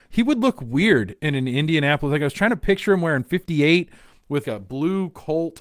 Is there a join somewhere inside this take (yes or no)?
yes